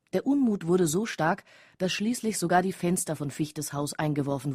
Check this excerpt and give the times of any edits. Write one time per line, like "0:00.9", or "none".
none